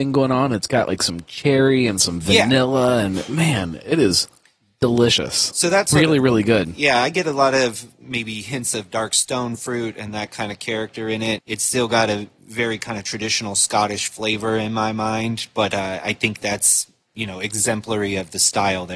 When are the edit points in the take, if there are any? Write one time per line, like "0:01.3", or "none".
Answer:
0:11.4